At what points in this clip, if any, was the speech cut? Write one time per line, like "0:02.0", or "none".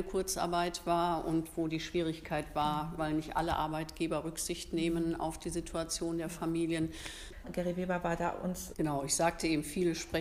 0:03.0
0:07.4
0:08.7